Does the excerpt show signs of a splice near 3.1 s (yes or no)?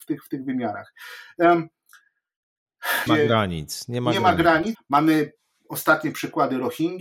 yes